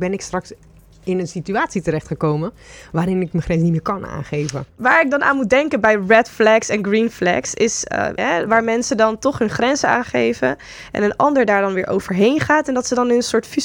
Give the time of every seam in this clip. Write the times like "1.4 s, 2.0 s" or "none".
8.2 s